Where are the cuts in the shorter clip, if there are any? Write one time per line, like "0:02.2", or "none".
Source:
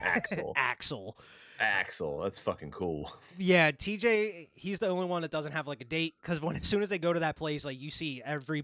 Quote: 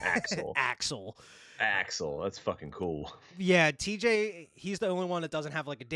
none